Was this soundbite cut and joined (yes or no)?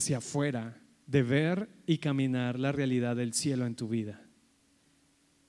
no